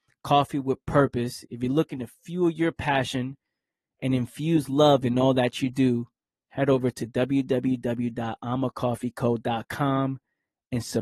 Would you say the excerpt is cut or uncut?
uncut